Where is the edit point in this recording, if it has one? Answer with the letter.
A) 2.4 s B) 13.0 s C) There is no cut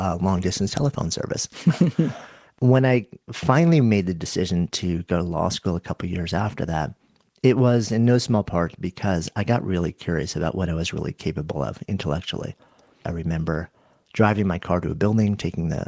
B